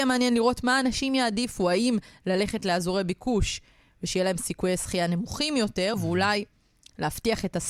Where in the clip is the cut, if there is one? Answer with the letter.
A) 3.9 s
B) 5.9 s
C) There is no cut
B